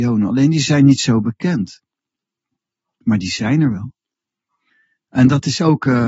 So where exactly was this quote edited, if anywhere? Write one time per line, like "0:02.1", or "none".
none